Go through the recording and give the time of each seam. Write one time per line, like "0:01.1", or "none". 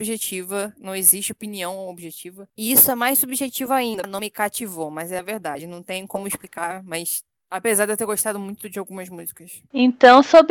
0:04.0
0:07.4